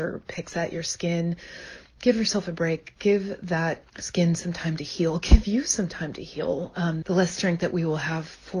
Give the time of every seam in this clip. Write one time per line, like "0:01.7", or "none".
0:03.9
0:07.0